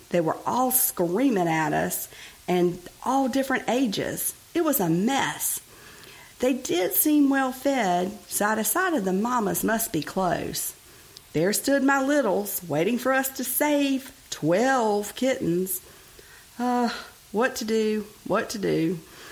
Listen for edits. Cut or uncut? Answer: uncut